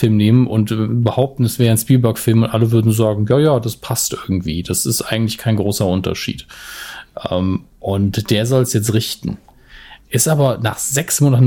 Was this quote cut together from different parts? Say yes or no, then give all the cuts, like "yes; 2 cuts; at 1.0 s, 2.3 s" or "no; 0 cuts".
no; 0 cuts